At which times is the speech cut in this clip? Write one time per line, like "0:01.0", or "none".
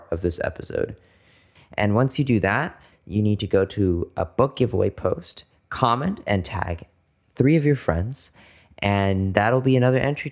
0:01.6
0:02.9